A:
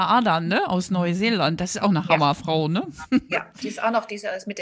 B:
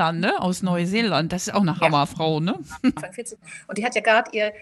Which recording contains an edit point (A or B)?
B